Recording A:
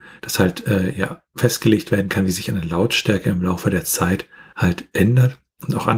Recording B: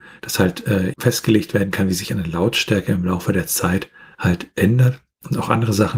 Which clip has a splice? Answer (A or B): B